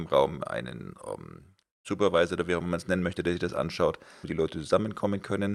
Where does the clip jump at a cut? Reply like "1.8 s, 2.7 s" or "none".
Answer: 1.6 s, 4.2 s

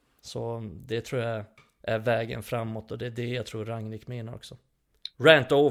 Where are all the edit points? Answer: none

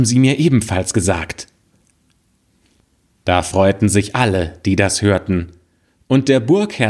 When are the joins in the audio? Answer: none

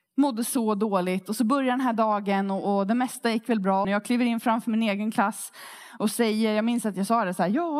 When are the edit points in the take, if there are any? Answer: 3.8 s

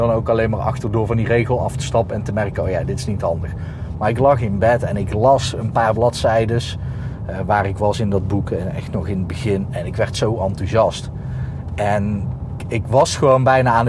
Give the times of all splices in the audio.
12.6 s

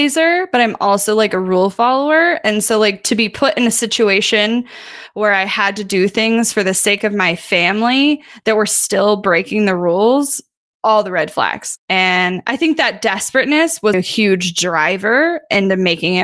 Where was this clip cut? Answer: 11.8 s, 13.9 s

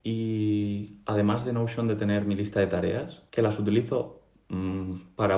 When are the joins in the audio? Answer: 3.3 s

